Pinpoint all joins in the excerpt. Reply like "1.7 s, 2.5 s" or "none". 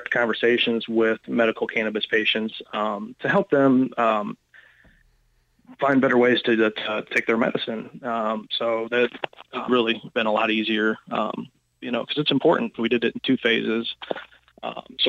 9.7 s, 12.7 s